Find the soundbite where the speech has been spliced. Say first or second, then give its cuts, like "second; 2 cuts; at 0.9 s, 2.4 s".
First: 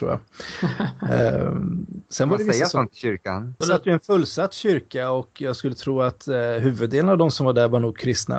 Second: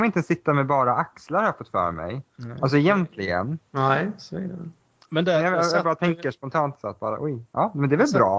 first; 1 cut; at 3.6 s